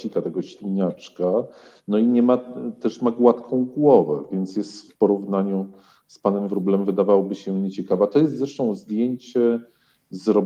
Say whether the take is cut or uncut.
uncut